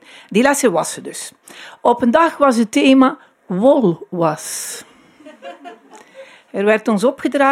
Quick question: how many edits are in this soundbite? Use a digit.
0